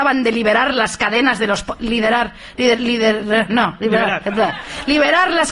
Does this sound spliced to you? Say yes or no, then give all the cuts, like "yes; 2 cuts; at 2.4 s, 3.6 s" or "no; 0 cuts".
no; 0 cuts